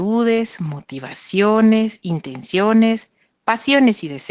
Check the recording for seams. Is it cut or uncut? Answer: uncut